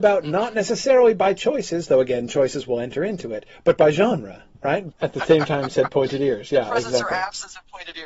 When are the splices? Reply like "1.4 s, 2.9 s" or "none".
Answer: 4.9 s